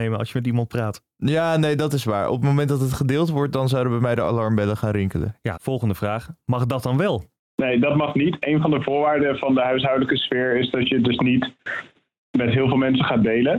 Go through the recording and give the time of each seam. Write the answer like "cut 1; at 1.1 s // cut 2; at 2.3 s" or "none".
cut 1; at 5.5 s